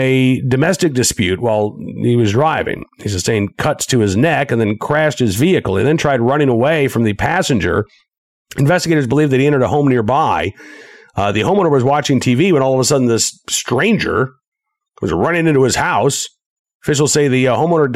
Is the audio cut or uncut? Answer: uncut